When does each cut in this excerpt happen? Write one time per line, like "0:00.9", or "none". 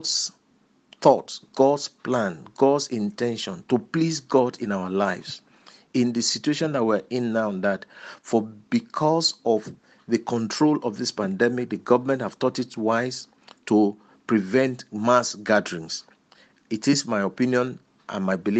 none